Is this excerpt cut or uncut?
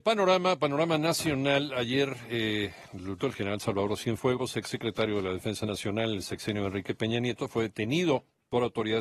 cut